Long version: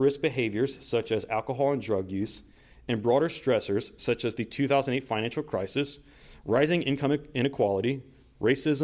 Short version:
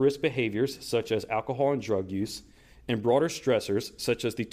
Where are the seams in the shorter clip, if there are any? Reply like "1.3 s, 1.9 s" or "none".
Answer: none